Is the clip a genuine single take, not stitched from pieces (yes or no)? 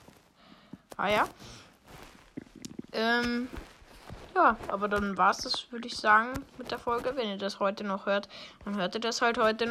yes